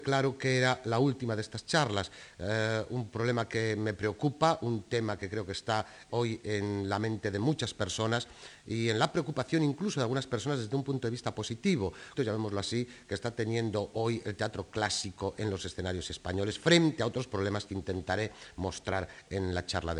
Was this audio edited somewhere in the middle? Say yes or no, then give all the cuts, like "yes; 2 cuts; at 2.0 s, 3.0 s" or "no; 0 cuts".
yes; 2 cuts; at 6.1 s, 12.1 s